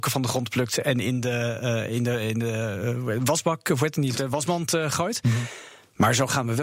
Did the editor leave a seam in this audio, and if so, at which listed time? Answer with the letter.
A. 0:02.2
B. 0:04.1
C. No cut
B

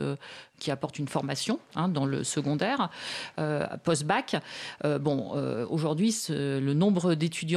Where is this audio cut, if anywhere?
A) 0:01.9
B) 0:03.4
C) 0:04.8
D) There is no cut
D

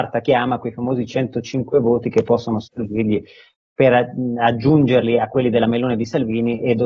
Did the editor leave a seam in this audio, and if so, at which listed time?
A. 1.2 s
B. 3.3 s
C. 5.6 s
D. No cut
D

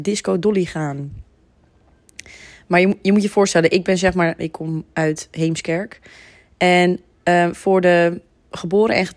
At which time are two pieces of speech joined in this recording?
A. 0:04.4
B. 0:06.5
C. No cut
A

